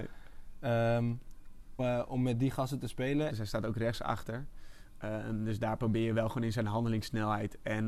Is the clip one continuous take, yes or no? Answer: no